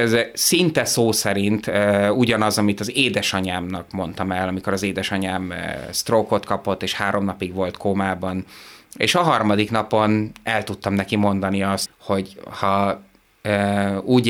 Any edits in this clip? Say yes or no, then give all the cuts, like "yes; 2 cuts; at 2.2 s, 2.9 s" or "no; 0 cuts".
yes; 2 cuts; at 8.8 s, 11.9 s